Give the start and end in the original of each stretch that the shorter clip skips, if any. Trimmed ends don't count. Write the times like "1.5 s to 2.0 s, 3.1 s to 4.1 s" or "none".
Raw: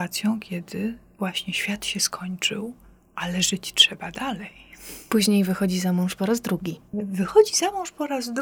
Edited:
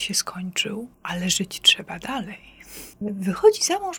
2.8 s to 3.1 s, 5.1 s to 6.9 s